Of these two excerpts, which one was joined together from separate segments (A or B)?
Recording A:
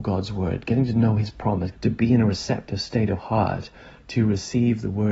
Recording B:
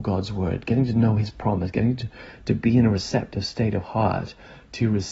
A